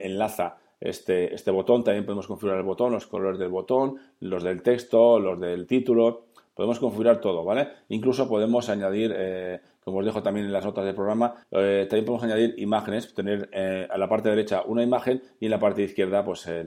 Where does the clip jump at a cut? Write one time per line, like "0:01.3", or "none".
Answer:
0:11.4